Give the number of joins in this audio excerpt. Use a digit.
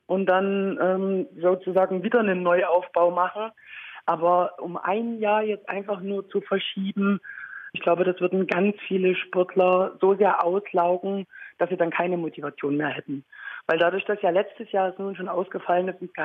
0